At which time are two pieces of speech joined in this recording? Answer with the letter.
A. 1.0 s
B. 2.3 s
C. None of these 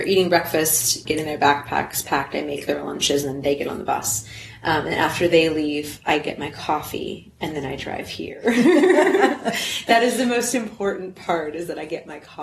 A